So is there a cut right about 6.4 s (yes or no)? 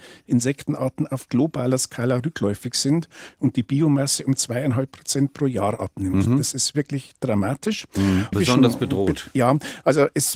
no